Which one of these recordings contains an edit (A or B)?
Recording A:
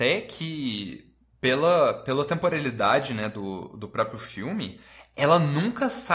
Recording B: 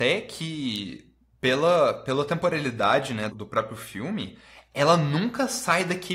B